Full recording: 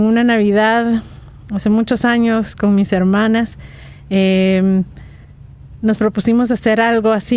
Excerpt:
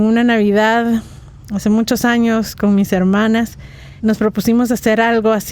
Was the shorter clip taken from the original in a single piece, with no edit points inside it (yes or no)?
no